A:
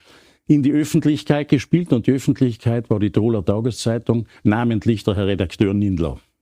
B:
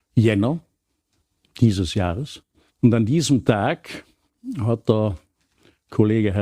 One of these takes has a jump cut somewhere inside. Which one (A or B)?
B